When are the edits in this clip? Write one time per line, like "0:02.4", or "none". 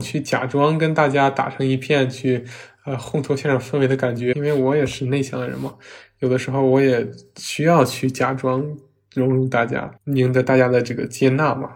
0:04.3
0:10.0